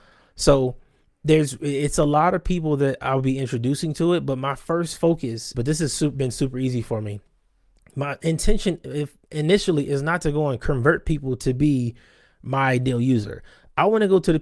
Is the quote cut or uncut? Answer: cut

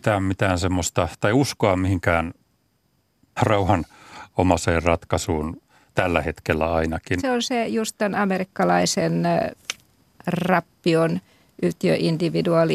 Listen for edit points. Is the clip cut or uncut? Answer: cut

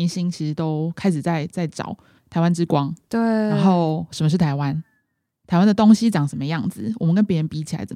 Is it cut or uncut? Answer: cut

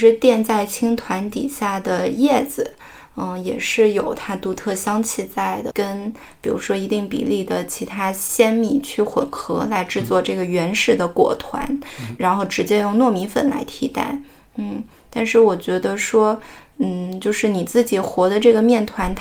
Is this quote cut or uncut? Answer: cut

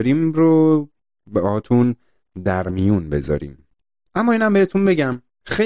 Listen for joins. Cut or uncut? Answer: uncut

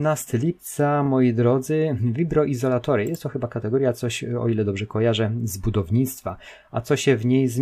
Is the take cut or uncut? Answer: uncut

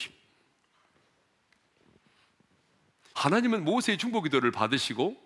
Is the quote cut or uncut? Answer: cut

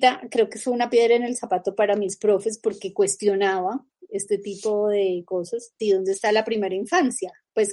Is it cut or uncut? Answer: cut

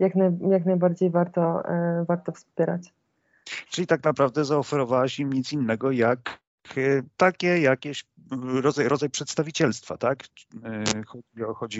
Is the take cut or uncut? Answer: uncut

